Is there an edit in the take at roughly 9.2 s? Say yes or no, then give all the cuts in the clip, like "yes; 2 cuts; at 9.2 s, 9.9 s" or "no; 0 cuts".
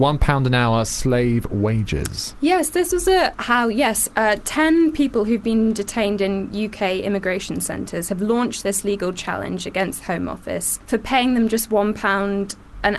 no; 2 cuts; at 3.4 s, 10.8 s